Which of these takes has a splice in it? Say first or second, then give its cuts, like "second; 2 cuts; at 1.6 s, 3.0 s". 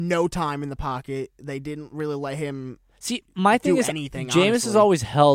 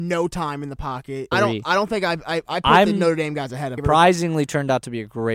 second; 2 cuts; at 1.3 s, 3.8 s